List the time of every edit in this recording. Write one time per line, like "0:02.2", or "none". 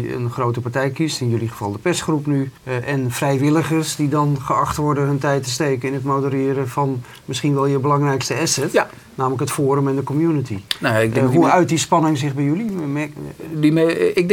0:02.6